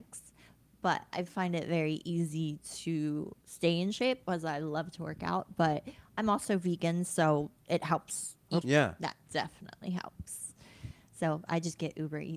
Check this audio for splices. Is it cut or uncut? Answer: cut